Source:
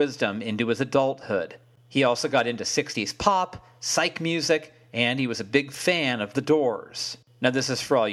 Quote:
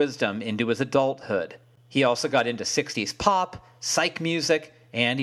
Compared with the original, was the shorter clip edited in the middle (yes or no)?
no